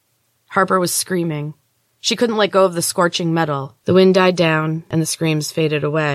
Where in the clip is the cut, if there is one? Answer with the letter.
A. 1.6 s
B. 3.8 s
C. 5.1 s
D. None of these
B